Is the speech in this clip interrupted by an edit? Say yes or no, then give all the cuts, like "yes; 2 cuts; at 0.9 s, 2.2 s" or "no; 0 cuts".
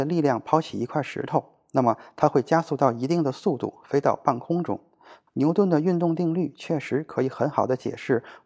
yes; 1 cut; at 5.3 s